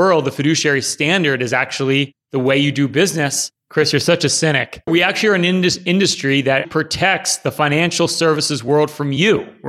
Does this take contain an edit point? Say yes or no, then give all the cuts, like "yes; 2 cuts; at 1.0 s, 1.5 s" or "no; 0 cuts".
yes; 3 cuts; at 3.6 s, 4.9 s, 6.6 s